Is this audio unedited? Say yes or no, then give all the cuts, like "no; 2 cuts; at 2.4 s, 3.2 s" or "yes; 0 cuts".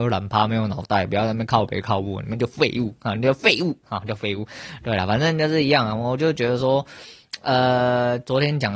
yes; 0 cuts